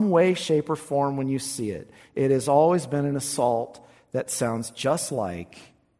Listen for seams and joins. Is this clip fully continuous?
yes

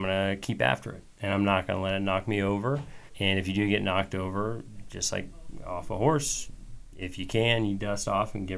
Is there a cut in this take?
yes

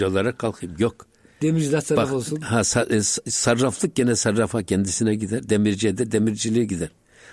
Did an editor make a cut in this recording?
no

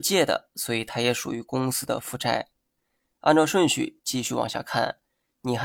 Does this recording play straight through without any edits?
no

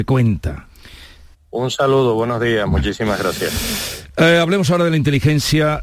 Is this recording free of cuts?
no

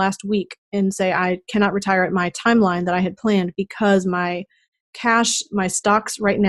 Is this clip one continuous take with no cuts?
yes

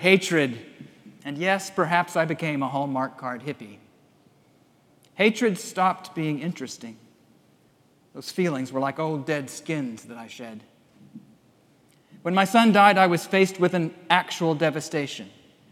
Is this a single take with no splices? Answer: no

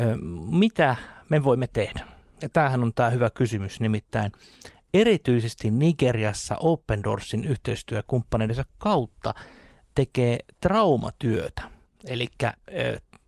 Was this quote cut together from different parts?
no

